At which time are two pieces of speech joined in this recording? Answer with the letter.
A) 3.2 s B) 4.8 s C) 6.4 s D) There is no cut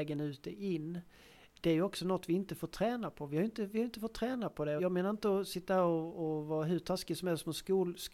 B